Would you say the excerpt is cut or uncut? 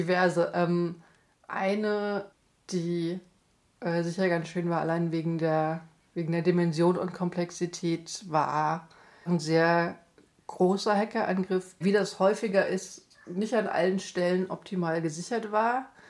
cut